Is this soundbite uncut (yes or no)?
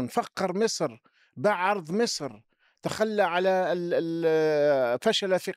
yes